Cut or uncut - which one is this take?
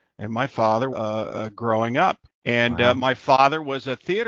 cut